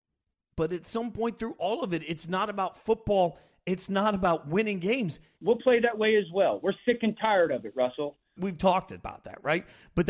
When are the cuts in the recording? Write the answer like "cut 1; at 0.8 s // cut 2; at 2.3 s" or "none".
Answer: cut 1; at 5.4 s // cut 2; at 8.4 s